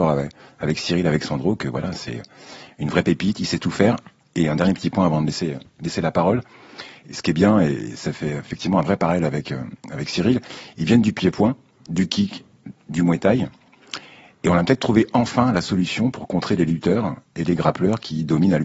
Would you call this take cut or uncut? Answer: uncut